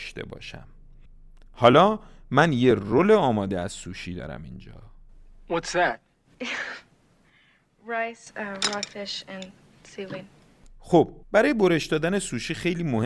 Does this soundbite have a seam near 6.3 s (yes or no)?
yes